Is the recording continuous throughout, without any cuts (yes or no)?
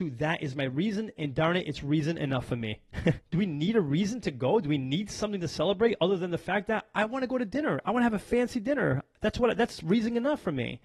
no